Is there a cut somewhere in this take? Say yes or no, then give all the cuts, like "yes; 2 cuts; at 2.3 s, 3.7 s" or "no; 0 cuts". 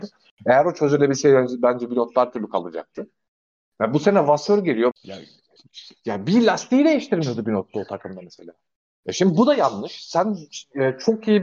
yes; 1 cut; at 4.9 s